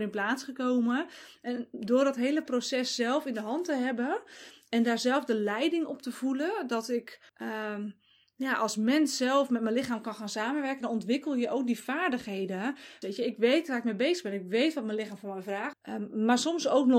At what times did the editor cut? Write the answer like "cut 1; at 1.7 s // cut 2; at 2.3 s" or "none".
cut 1; at 7.3 s // cut 2; at 13.0 s // cut 3; at 15.7 s